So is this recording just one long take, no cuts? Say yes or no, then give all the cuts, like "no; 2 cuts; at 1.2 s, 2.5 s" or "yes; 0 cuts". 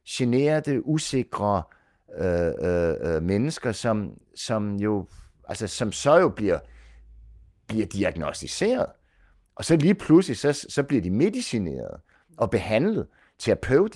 yes; 0 cuts